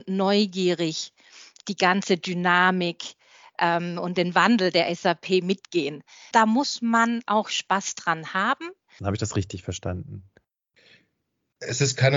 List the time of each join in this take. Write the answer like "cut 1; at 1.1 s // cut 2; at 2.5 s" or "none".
cut 1; at 6.3 s // cut 2; at 9.0 s